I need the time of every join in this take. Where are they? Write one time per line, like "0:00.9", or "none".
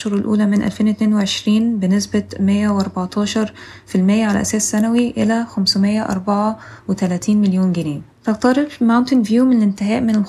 0:08.1